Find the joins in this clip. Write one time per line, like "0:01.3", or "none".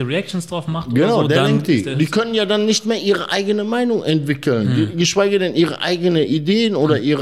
none